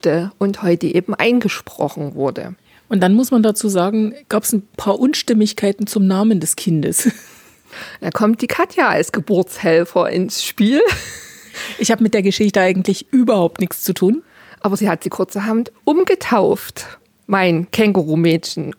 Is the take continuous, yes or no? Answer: yes